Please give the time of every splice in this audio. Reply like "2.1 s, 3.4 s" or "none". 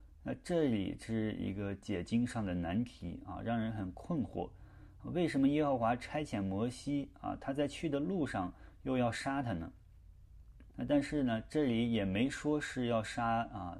10.7 s